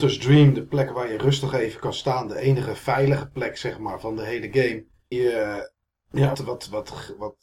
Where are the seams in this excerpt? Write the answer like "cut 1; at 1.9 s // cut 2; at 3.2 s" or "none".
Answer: cut 1; at 5.1 s // cut 2; at 6.3 s